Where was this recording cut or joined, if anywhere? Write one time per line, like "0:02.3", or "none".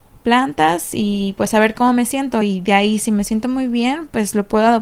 none